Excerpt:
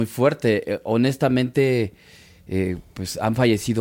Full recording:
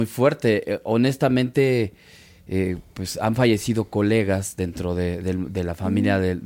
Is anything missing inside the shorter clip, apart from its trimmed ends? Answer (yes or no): no